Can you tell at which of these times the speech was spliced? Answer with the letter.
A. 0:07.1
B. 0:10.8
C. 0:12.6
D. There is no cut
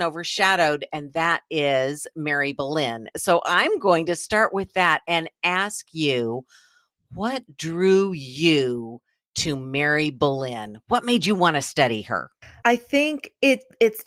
C